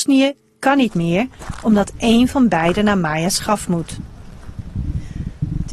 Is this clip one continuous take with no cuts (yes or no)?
yes